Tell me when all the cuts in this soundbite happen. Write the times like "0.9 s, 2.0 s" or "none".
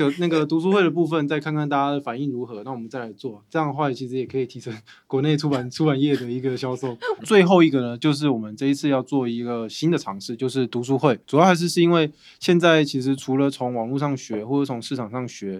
7.2 s, 11.2 s